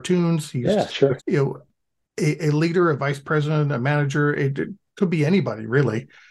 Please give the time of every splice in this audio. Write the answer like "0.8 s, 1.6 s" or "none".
1.2 s

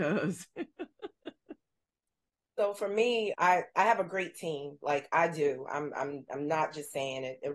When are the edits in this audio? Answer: 3.3 s

